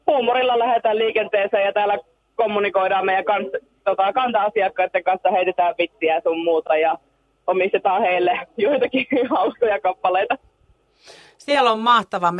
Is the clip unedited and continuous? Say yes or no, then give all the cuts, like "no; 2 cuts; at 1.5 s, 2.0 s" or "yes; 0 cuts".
yes; 0 cuts